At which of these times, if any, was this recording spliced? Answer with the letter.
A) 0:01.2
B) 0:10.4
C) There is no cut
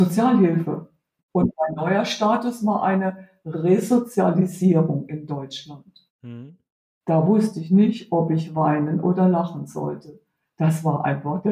A